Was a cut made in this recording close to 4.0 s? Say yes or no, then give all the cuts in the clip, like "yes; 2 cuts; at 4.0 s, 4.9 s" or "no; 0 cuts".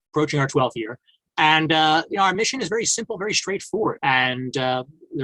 yes; 1 cut; at 4.0 s